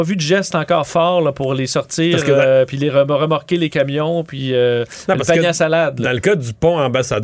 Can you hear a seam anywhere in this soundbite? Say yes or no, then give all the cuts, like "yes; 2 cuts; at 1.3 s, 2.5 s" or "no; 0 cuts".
no; 0 cuts